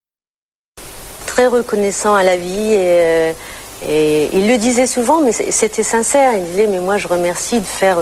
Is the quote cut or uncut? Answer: uncut